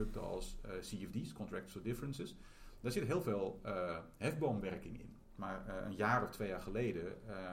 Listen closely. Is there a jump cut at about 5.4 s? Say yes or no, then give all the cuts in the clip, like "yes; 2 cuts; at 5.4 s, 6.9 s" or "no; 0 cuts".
yes; 1 cut; at 5.4 s